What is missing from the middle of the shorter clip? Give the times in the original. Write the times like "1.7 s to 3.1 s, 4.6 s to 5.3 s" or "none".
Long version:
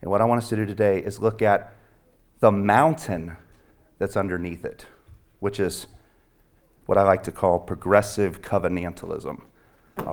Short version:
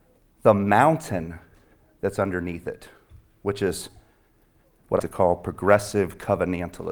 7.0 s to 7.2 s